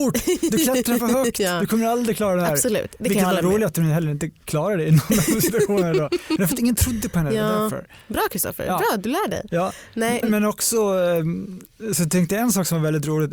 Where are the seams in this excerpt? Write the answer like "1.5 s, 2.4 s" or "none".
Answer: 10.2 s